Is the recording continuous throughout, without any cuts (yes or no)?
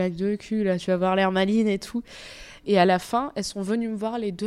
yes